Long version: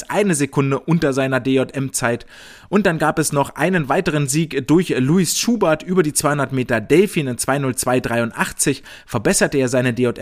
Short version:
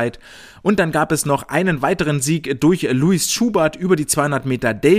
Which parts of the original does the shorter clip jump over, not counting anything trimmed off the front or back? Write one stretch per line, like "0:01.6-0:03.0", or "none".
none